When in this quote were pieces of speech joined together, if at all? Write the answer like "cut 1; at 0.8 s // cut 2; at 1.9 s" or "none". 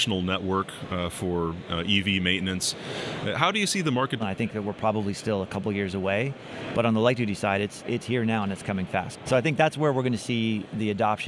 cut 1; at 4.2 s // cut 2; at 9.2 s